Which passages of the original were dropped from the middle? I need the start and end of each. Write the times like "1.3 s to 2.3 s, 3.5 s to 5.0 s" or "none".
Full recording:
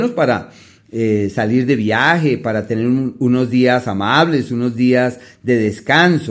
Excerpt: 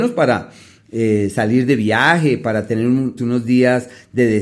3.2 s to 4.5 s